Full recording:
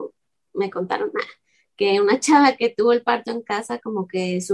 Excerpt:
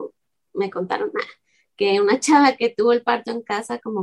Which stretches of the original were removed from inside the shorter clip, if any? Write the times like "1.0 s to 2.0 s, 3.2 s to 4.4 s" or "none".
none